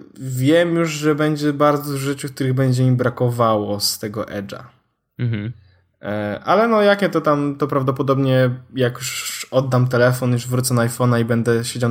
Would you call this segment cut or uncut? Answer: uncut